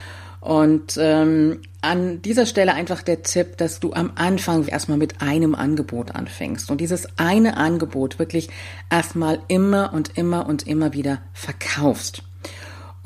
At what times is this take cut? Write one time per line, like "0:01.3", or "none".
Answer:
0:04.7